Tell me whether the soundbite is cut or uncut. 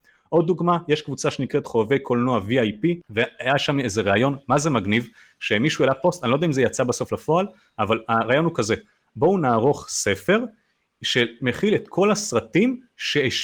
cut